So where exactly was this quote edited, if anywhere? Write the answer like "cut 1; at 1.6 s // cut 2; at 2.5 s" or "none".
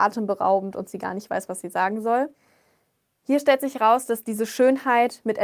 none